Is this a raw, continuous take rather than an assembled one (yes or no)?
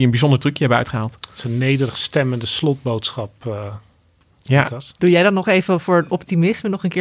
yes